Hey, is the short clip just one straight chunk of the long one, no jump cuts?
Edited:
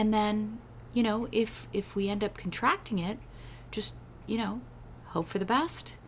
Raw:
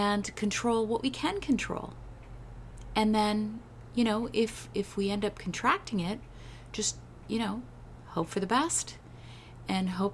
yes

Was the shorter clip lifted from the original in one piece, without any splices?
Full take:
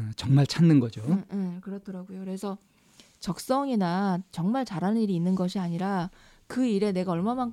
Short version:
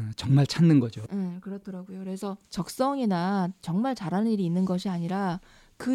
no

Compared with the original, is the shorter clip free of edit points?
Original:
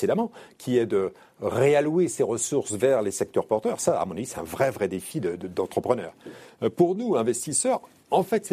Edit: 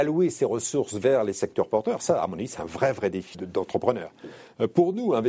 no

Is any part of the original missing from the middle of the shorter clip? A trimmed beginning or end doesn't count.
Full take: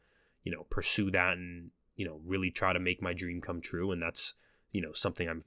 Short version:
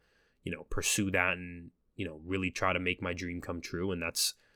no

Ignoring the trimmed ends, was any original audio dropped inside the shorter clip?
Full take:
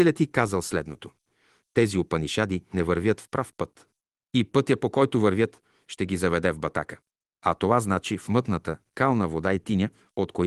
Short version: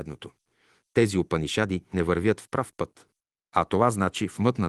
yes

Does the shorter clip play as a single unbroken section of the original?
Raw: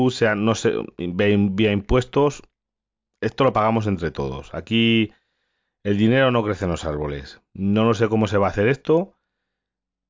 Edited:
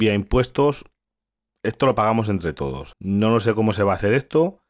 no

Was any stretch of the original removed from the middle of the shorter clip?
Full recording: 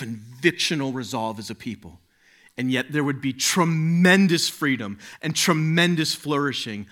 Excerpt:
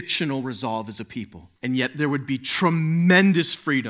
yes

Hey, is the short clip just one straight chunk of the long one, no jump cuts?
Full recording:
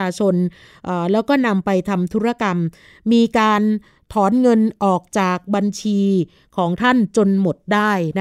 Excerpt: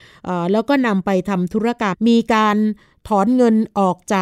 no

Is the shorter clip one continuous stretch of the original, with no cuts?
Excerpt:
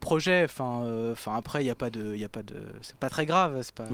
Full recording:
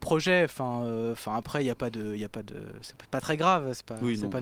no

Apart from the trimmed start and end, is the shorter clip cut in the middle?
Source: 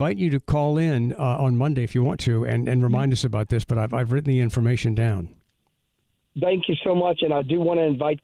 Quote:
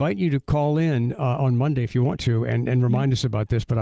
no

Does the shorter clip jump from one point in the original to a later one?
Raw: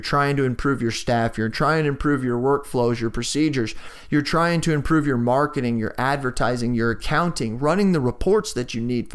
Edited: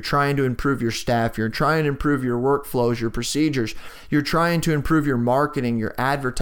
no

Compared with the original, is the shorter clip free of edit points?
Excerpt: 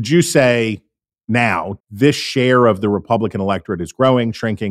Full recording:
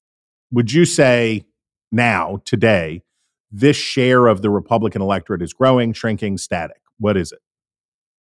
no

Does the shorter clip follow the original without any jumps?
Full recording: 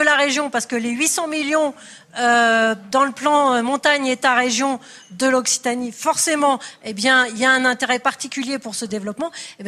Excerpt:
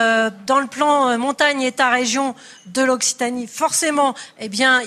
yes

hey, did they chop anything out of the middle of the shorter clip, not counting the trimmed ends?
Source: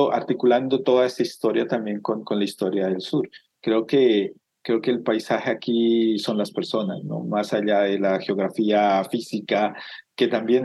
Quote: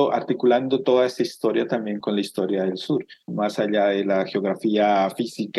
yes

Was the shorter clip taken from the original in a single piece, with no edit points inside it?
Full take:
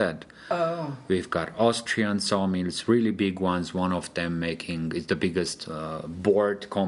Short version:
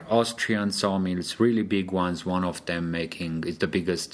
yes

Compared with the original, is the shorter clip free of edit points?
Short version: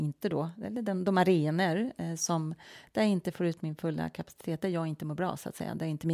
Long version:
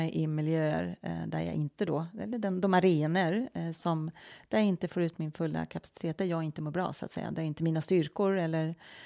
yes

